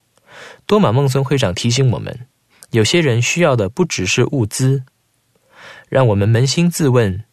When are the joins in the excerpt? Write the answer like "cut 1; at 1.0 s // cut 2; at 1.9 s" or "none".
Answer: none